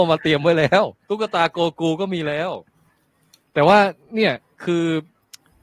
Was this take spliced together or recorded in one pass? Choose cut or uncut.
cut